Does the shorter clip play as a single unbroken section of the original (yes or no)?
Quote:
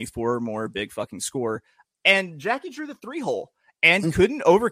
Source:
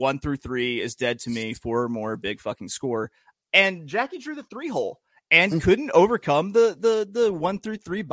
yes